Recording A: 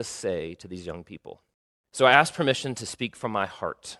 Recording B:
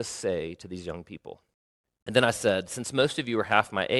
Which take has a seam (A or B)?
B